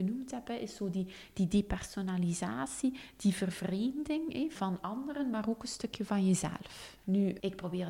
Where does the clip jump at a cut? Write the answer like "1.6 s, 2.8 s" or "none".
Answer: 4.6 s